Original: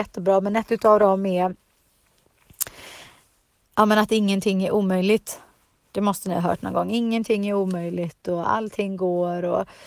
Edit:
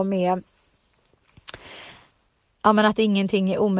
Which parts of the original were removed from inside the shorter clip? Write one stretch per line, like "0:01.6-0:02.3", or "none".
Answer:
none